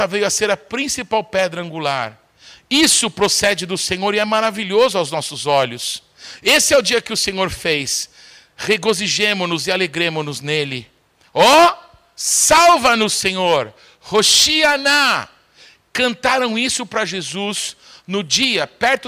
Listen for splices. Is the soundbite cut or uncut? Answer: uncut